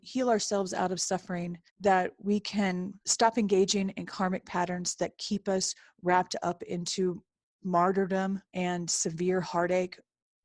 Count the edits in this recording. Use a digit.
3